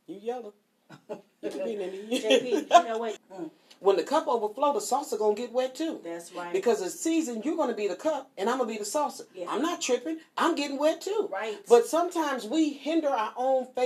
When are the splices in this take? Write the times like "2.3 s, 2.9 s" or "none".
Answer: 3.2 s